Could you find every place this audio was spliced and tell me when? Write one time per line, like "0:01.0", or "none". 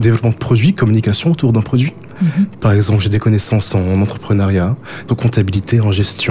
0:02.2
0:05.1